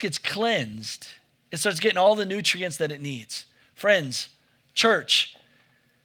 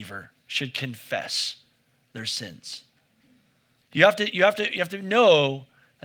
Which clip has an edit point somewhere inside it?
second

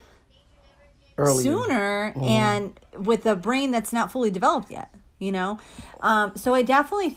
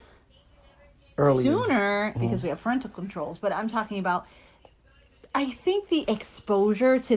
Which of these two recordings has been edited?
second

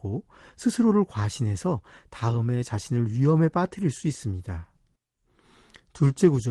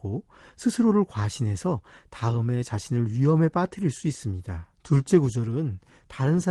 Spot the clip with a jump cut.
second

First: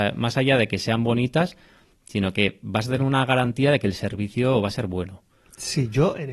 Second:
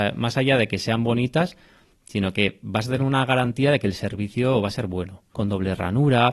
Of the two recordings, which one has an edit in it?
second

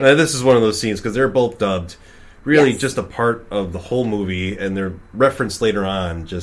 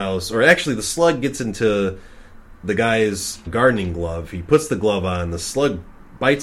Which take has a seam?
second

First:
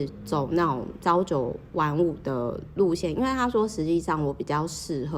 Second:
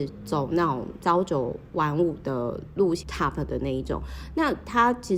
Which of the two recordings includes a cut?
second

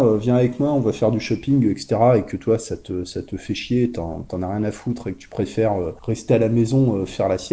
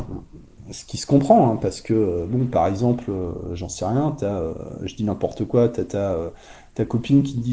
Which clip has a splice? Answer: first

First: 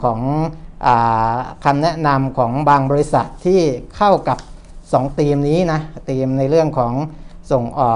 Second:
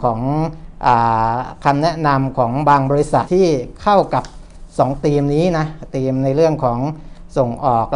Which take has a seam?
second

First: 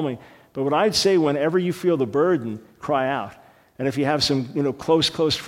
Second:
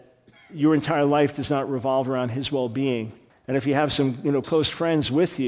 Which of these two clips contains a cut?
second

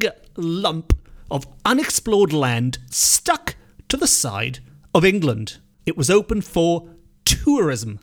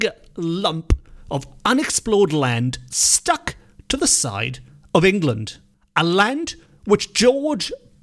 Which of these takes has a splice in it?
first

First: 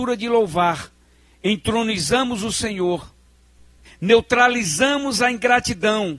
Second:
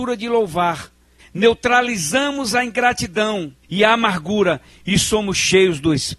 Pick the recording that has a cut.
second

